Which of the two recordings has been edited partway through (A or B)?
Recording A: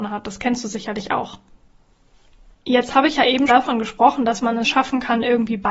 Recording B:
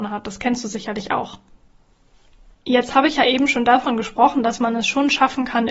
A